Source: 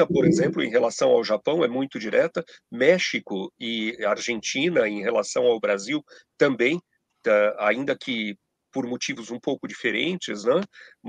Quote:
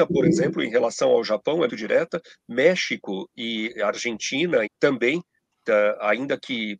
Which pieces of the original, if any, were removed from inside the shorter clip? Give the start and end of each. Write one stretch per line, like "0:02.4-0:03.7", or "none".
0:01.7-0:01.9
0:04.9-0:06.2